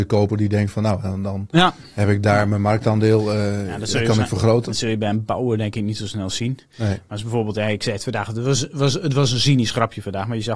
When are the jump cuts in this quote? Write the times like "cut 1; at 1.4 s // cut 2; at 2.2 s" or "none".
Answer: none